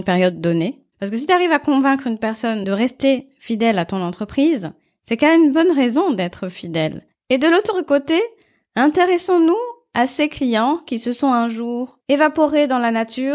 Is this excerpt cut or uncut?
cut